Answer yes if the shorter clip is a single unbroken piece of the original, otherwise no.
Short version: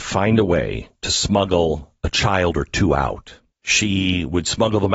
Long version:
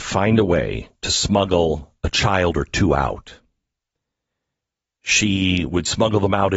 no